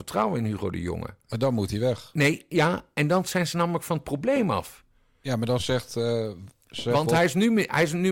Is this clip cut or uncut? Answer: uncut